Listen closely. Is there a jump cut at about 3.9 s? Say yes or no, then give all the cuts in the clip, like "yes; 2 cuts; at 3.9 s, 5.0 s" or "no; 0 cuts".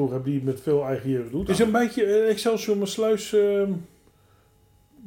no; 1 cut; at 1.5 s